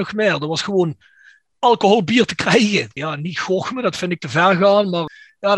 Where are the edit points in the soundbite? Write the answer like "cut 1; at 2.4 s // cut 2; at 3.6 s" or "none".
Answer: cut 1; at 3.0 s